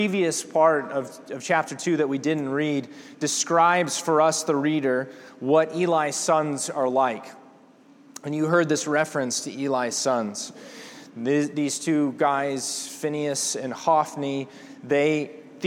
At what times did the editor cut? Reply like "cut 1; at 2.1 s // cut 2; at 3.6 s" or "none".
none